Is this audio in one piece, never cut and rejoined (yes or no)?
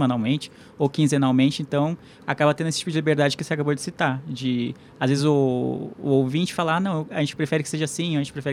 yes